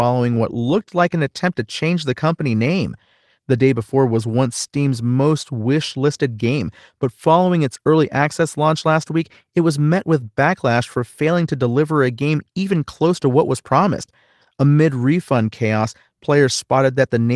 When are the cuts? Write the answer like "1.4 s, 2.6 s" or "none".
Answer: none